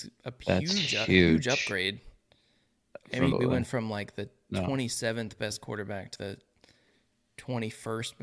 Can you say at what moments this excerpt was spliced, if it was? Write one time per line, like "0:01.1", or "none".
0:03.3
0:06.2